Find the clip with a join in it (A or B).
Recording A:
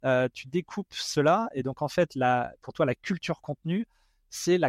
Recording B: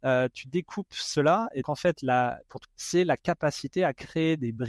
B